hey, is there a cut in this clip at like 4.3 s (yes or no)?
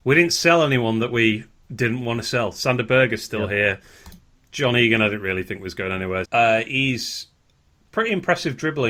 no